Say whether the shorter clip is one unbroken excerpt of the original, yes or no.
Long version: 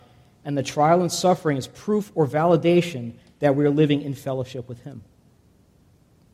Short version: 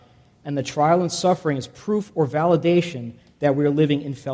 yes